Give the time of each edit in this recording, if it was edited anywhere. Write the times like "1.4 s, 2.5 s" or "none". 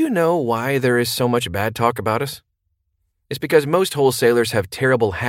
none